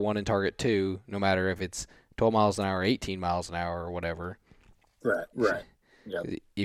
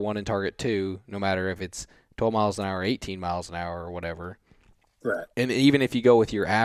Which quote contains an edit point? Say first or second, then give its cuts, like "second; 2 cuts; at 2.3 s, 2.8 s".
first; 1 cut; at 5.3 s